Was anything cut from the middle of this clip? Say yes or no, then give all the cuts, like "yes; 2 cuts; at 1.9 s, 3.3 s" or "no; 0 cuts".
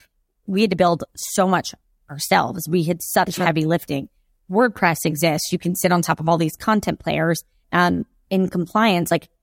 yes; 1 cut; at 7.6 s